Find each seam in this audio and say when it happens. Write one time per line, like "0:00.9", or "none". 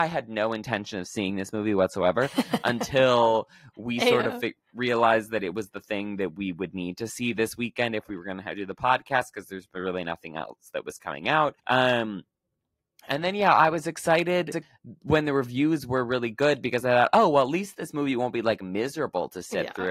0:11.6